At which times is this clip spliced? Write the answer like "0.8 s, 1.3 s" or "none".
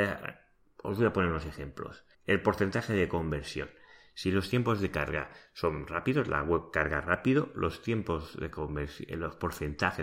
2.1 s

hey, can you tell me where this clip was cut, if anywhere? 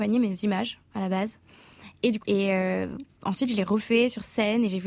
2.2 s

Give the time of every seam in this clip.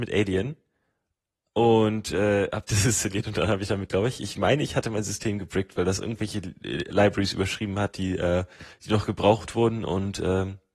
none

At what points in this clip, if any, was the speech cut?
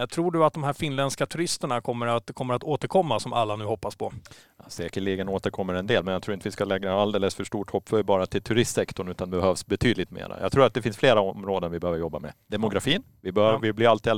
none

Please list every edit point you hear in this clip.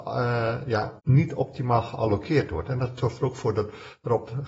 1.0 s

